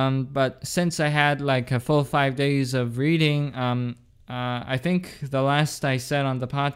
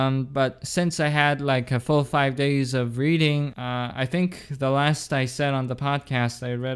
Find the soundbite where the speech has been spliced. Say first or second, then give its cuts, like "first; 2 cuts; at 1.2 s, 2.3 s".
second; 1 cut; at 3.5 s